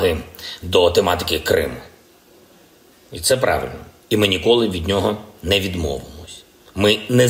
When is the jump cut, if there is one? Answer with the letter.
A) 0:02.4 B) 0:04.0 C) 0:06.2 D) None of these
B